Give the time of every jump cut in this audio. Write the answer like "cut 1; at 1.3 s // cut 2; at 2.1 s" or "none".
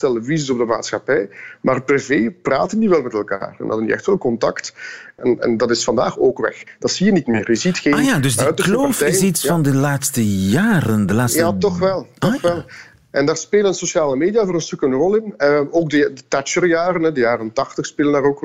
none